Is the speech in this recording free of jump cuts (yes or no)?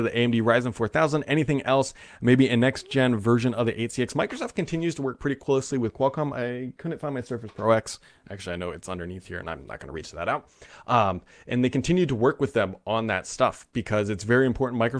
yes